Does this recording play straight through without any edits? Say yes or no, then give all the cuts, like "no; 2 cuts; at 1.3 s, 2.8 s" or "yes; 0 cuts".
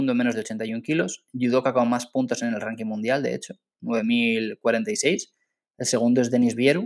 yes; 0 cuts